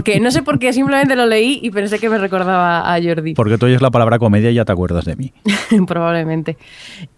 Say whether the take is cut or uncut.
uncut